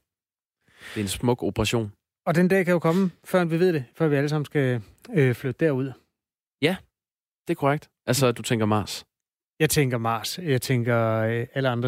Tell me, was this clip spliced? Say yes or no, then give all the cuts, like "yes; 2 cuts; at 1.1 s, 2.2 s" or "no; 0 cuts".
no; 0 cuts